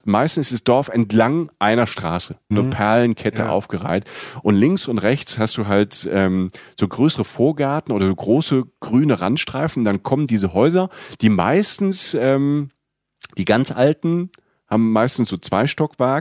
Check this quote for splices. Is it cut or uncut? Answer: cut